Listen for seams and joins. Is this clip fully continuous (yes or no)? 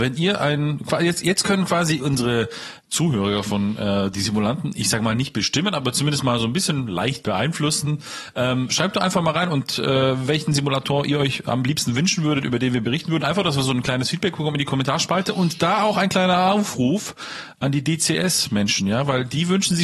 yes